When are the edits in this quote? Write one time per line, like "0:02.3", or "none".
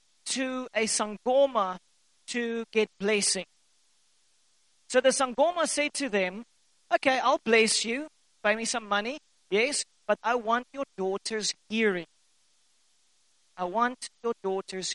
0:10.2